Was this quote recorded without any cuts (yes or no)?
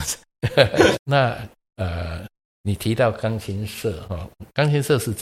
no